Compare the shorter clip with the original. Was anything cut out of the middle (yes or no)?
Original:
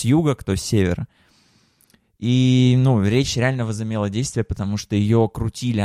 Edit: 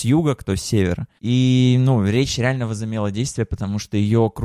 yes